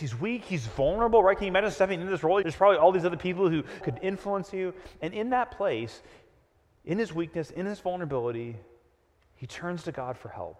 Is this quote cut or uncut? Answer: cut